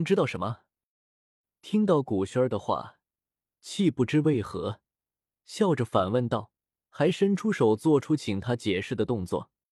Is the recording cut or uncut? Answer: uncut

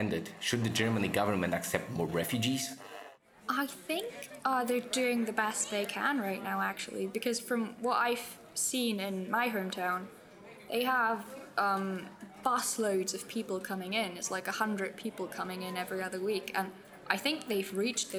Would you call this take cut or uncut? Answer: uncut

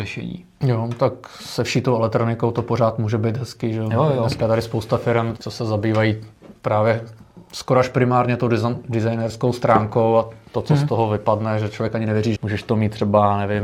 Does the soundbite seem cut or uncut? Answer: cut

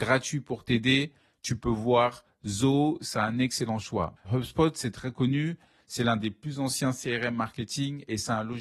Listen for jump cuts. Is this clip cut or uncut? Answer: cut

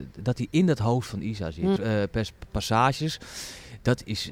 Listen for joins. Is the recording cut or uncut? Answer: cut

